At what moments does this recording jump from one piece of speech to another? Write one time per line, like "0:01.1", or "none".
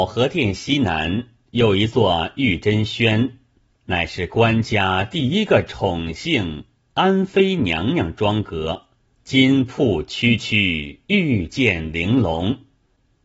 0:09.1